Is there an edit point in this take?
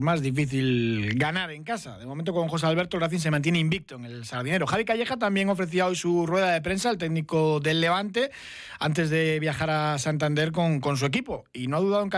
no; 0 cuts

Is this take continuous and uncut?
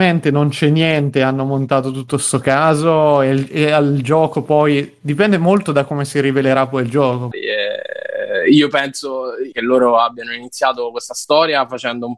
no; 2 cuts; at 7.3 s, 9.5 s

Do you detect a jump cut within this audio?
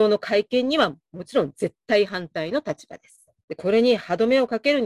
yes; 1 cut; at 3.4 s

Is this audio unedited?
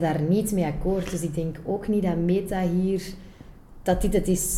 yes; 0 cuts

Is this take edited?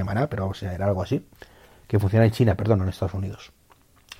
no; 0 cuts

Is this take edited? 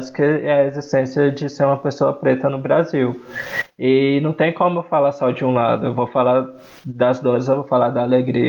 no; 0 cuts

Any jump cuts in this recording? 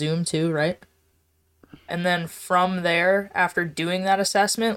yes; 1 cut; at 1.9 s

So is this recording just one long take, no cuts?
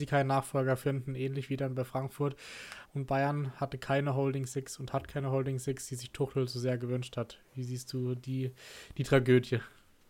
no; 1 cut; at 2.9 s

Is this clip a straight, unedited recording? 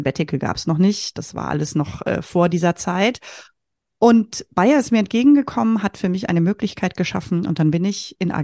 yes; 0 cuts

